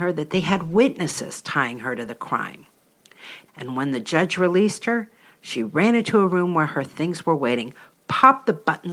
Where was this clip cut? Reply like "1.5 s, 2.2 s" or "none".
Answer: 3.5 s